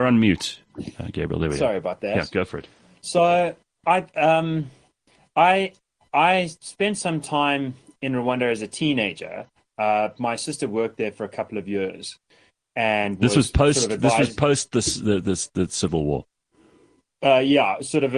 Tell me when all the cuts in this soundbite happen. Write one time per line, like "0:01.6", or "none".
none